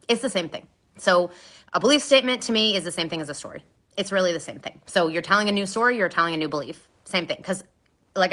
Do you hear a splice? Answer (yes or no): no